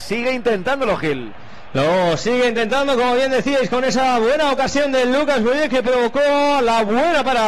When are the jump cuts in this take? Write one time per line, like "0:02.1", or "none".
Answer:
none

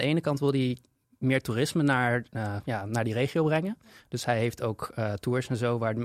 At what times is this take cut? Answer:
none

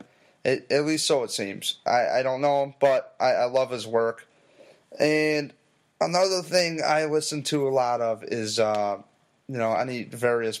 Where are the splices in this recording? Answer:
none

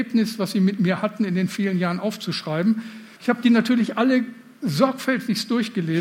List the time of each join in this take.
0:03.2

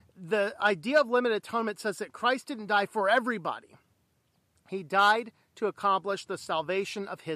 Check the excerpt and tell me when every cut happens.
none

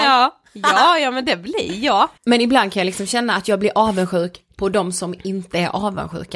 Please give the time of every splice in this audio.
0:02.2

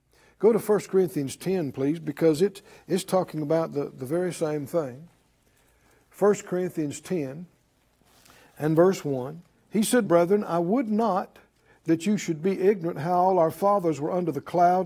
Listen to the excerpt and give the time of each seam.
0:10.0

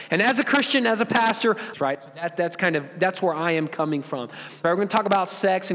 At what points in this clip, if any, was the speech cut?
0:01.7
0:04.6

